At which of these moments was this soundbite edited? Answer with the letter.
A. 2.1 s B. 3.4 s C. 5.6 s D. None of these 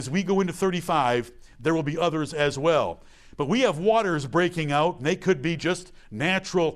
D